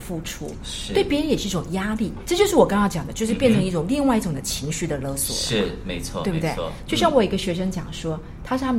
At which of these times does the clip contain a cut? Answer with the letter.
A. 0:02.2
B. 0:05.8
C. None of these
A